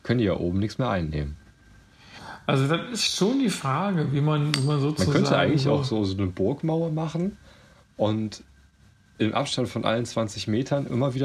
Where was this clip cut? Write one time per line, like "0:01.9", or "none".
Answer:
none